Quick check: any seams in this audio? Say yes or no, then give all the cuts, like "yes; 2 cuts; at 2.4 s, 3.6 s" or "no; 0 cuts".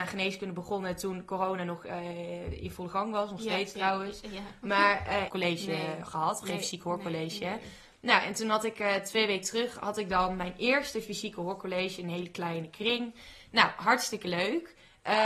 yes; 1 cut; at 5.3 s